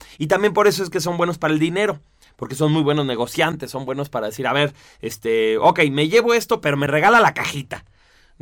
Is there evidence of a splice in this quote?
no; 0 cuts

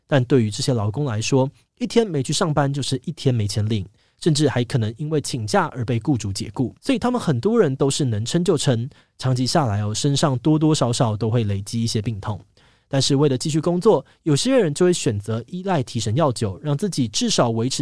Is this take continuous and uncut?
no; 1 cut; at 6.8 s

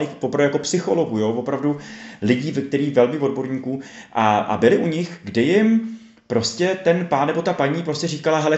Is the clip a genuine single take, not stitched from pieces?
yes; 0 cuts

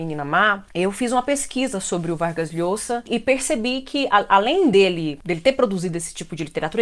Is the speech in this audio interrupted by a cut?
no; 0 cuts

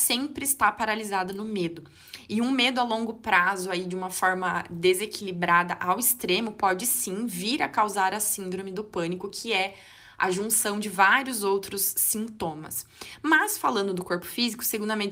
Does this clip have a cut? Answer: no; 0 cuts

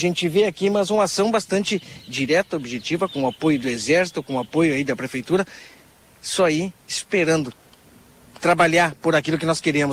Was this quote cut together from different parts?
no; 0 cuts

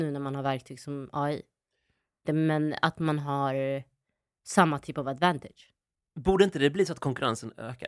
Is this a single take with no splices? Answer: no; 1 cut; at 2.2 s

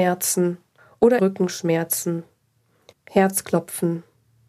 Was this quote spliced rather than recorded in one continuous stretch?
yes; 2 cuts; at 1.2 s, 2.9 s

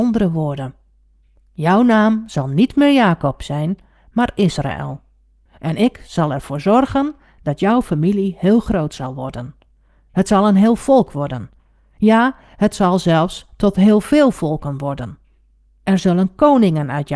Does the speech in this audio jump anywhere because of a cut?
no; 0 cuts

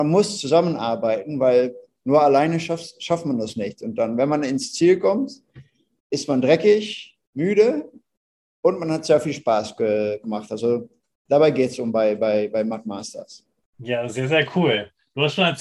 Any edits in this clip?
yes; 1 cut; at 7.3 s

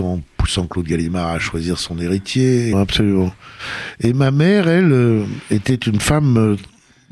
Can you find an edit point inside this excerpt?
yes; 1 cut; at 2.7 s

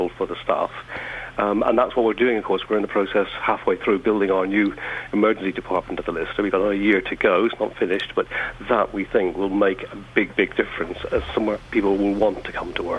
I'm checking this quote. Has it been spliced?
no; 0 cuts

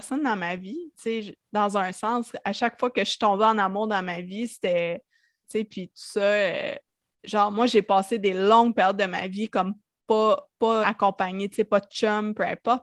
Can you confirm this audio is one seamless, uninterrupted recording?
no; 3 cuts; at 0.9 s, 5.4 s, 10.8 s

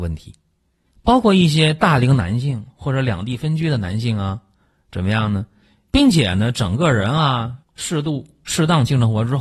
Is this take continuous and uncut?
no; 2 cuts; at 5.9 s, 7.6 s

